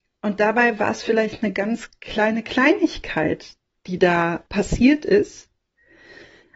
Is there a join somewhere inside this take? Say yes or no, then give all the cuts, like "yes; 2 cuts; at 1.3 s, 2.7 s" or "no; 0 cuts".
yes; 1 cut; at 4.5 s